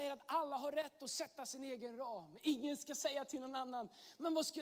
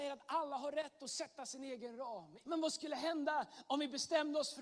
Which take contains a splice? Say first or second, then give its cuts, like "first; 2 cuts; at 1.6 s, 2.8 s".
second; 1 cut; at 2.4 s